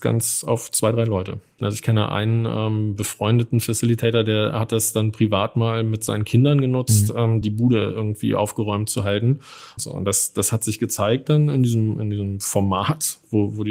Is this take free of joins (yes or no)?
no